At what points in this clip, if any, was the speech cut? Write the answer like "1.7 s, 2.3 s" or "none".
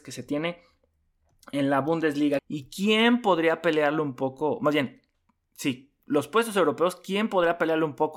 2.4 s